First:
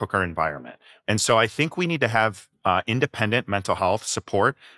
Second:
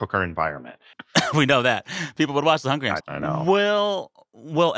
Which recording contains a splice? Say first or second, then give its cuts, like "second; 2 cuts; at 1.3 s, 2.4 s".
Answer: second; 2 cuts; at 0.9 s, 3.0 s